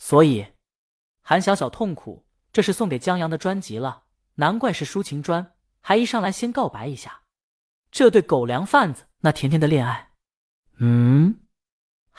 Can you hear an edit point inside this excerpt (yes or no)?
yes